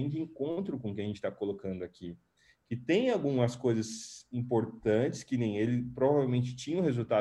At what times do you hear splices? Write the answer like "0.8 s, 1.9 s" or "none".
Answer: none